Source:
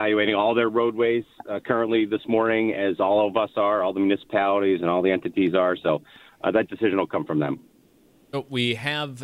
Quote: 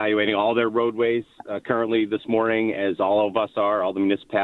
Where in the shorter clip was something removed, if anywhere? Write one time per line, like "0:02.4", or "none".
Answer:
none